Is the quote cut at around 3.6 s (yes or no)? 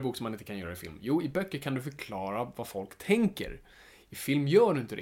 no